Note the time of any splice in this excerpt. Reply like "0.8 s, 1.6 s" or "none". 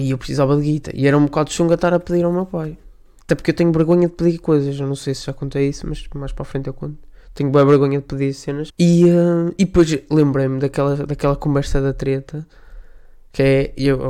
8.7 s